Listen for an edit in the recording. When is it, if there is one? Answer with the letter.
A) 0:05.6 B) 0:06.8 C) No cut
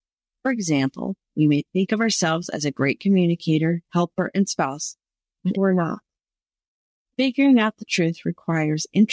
A